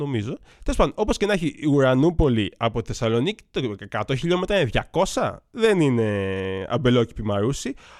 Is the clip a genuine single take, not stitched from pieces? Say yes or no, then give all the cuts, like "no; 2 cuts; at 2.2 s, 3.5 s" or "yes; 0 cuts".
yes; 0 cuts